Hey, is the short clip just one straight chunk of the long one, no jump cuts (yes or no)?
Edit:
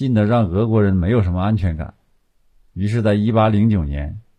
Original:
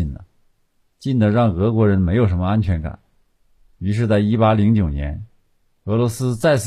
yes